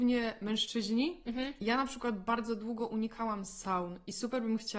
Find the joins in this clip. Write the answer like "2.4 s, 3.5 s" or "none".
none